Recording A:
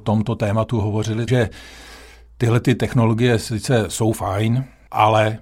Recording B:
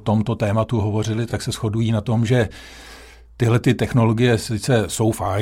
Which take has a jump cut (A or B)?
A